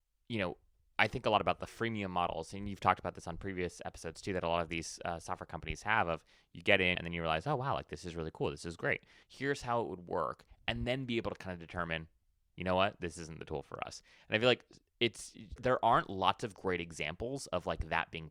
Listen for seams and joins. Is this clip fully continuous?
no; 3 cuts; at 7.0 s, 9.2 s, 15.6 s

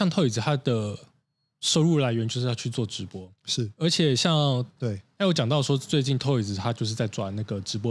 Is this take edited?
yes; 1 cut; at 4.8 s

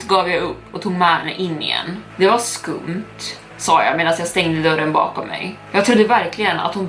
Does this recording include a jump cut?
no; 0 cuts

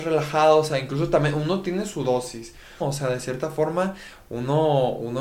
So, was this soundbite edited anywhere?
yes; 1 cut; at 2.8 s

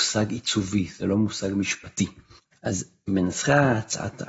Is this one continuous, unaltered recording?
no; 1 cut; at 2.5 s

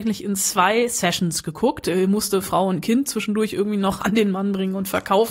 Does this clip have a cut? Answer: no; 0 cuts

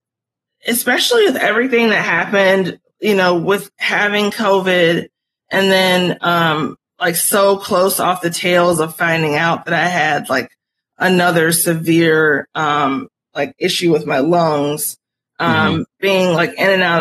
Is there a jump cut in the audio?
no; 0 cuts

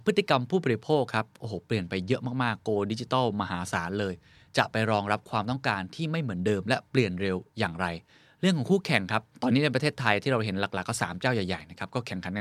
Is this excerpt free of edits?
yes; 0 cuts

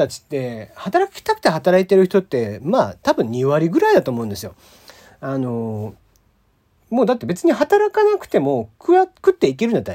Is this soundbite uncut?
yes; 0 cuts

